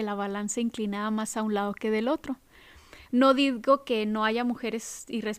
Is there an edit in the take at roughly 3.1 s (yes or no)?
yes